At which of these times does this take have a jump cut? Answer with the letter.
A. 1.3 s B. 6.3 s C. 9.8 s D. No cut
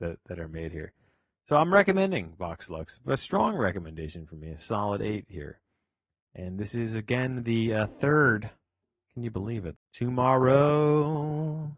C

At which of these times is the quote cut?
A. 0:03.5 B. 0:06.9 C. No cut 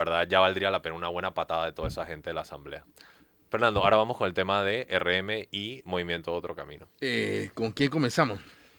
B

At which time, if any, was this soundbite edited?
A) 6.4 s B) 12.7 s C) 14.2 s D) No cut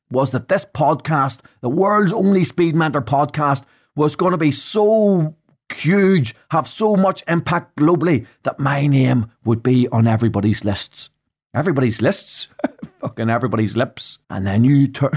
C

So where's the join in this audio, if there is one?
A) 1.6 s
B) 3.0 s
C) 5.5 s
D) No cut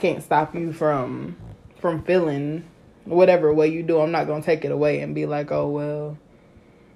D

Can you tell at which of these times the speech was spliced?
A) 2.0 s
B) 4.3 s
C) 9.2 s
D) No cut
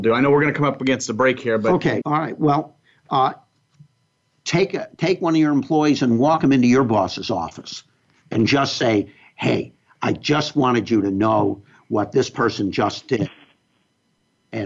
A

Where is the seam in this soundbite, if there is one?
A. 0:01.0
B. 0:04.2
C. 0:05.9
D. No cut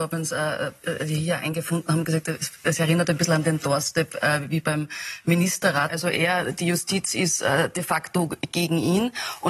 C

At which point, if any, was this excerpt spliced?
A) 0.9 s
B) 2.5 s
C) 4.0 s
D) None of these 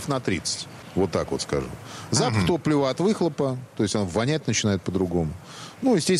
D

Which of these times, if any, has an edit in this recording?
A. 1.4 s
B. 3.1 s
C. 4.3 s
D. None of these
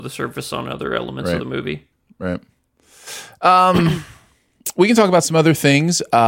D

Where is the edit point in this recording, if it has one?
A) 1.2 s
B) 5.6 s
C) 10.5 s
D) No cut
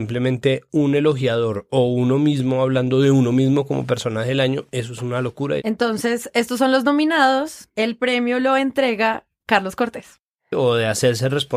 C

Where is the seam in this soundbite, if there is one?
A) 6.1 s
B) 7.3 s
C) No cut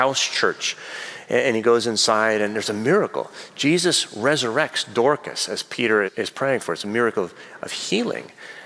A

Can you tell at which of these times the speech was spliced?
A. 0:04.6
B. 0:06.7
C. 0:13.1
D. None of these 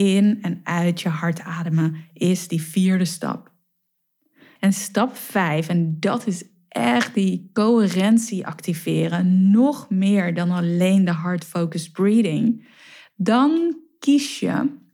A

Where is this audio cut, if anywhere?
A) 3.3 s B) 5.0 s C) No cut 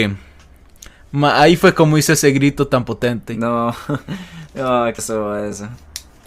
B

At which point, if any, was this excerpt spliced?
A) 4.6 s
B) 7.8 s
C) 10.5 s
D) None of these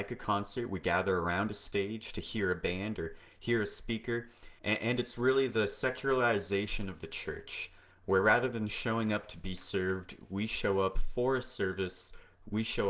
A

